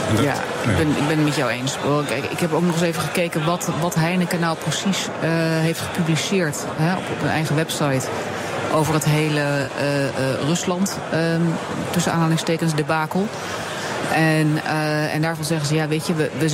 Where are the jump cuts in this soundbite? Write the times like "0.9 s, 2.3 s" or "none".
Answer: none